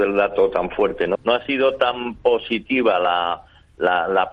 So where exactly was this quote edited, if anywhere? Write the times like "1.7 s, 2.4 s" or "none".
1.2 s